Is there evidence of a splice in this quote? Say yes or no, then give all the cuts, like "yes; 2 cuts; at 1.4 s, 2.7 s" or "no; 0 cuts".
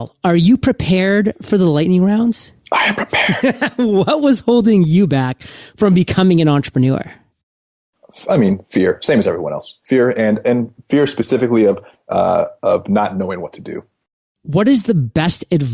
no; 0 cuts